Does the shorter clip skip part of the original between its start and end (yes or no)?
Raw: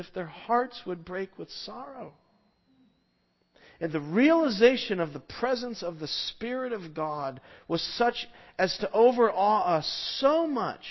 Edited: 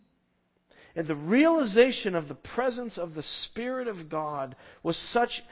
no